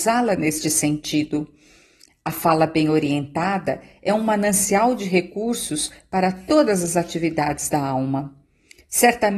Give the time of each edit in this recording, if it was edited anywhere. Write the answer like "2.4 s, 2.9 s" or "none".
none